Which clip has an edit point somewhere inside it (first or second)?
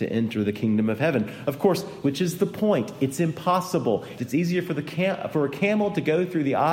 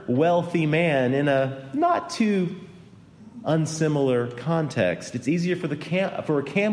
first